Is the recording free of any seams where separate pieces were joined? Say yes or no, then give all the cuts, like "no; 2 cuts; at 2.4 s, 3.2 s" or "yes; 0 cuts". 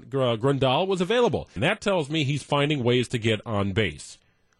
no; 1 cut; at 1.6 s